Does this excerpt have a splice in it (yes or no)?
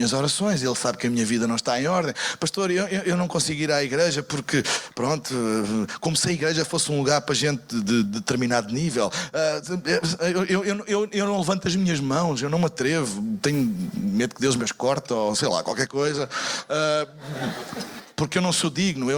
no